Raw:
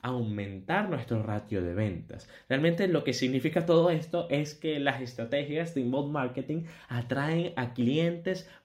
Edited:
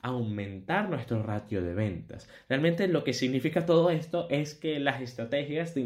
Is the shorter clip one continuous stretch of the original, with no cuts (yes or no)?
yes